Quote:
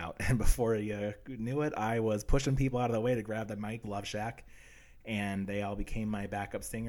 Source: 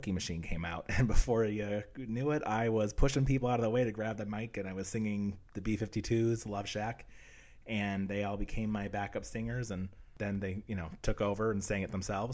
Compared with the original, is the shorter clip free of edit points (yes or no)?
no